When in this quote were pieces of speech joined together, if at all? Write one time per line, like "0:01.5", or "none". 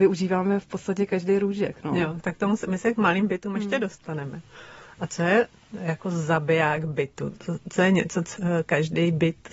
none